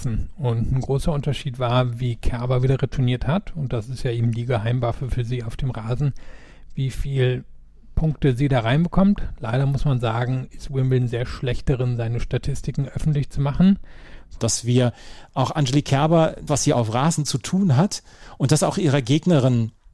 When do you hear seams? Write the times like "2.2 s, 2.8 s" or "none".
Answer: 14.4 s, 16.5 s